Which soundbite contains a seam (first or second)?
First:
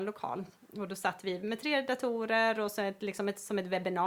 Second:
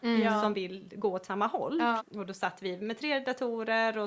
second